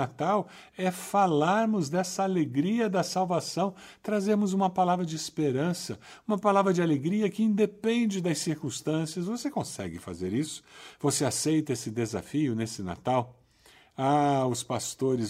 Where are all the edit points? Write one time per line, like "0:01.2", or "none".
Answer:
none